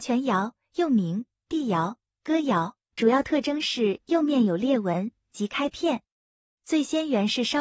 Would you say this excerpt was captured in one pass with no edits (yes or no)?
yes